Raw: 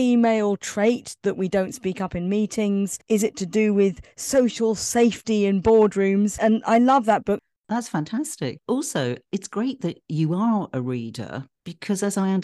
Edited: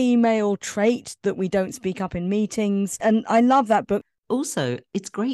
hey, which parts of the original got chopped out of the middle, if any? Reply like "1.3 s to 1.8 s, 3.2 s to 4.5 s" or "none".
3.0 s to 6.4 s, 7.6 s to 8.6 s